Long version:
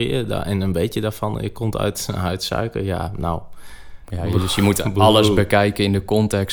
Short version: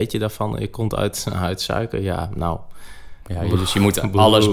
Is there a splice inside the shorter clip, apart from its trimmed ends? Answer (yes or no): no